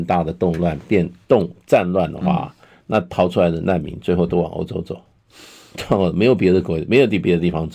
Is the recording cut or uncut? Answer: uncut